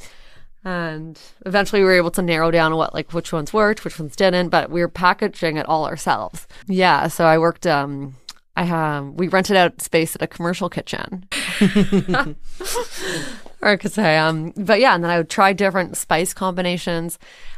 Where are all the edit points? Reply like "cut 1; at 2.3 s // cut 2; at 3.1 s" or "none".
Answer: cut 1; at 6.6 s // cut 2; at 11.3 s